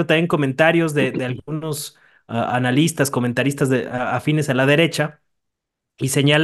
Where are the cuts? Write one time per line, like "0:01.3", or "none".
none